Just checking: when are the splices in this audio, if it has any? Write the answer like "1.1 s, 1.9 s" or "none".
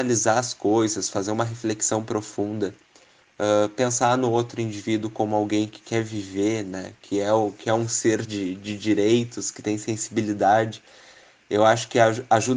none